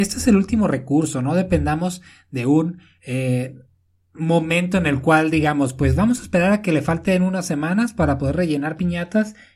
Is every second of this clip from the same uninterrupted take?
yes; 0 cuts

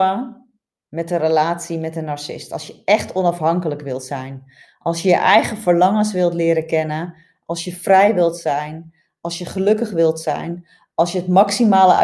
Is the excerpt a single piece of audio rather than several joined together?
yes; 0 cuts

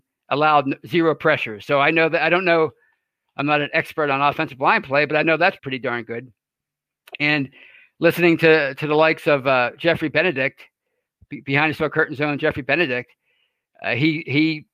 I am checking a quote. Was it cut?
yes; 1 cut; at 5.6 s

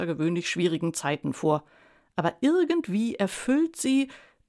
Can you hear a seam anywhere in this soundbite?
no; 0 cuts

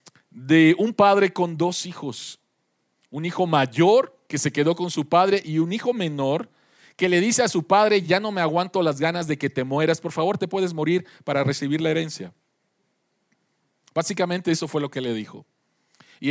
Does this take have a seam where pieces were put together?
no; 0 cuts

